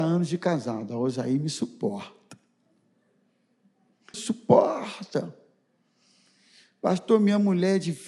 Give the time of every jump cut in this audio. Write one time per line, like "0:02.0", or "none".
0:04.1